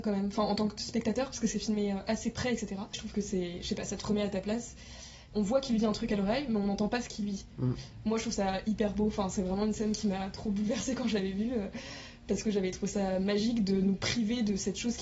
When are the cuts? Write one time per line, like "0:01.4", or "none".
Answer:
0:02.9
0:05.3